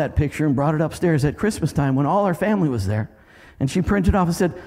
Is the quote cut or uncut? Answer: uncut